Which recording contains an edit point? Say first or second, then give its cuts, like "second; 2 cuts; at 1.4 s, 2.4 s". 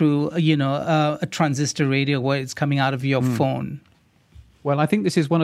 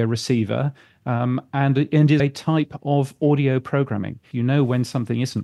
second; 2 cuts; at 2.2 s, 4.3 s